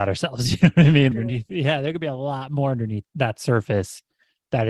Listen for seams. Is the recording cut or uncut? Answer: cut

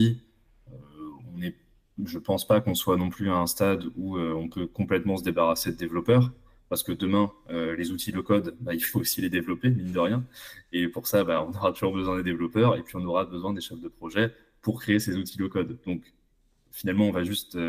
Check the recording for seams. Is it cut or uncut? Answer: uncut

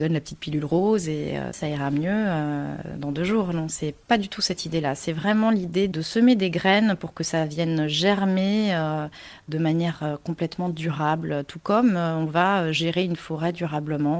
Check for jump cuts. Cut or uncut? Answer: cut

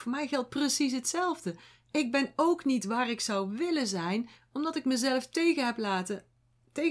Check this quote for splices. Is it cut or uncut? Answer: uncut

